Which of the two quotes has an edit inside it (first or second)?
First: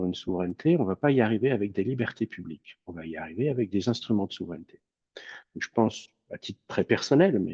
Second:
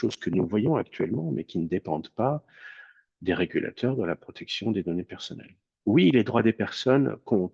second